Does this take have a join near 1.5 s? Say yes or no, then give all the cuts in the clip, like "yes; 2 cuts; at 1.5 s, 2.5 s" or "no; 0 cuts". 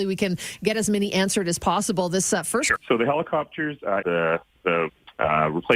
no; 2 cuts; at 2.8 s, 4.0 s